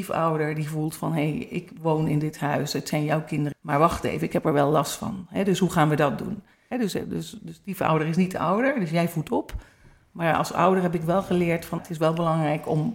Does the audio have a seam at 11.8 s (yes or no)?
yes